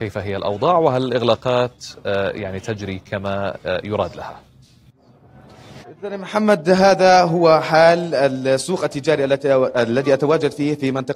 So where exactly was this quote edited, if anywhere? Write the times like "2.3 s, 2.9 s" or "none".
5.8 s